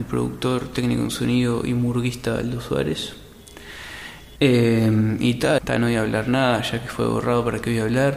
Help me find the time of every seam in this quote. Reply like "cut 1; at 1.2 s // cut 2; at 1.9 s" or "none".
cut 1; at 4.4 s // cut 2; at 5.6 s